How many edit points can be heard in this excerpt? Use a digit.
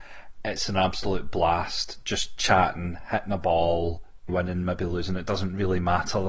1